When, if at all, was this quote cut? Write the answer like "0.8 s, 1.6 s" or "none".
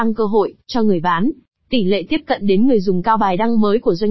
none